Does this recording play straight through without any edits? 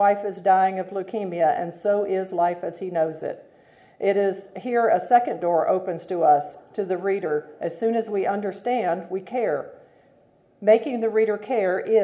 yes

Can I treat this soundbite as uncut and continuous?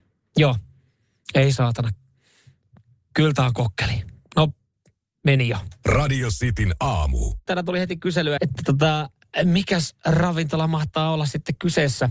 no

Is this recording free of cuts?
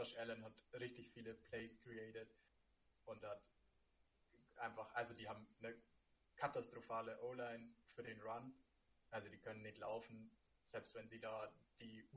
yes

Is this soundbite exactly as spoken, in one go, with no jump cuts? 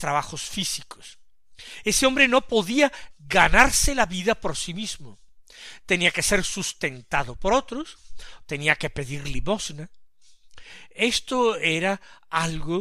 yes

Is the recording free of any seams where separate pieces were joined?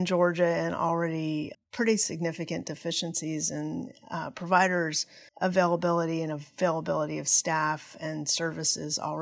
no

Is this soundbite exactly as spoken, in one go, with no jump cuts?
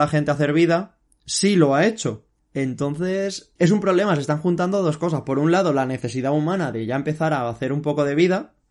no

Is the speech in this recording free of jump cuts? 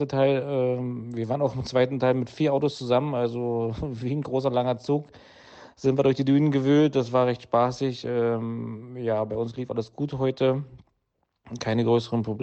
yes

